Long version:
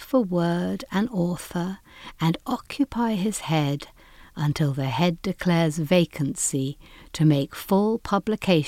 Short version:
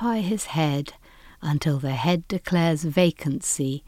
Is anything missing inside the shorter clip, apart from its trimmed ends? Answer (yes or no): no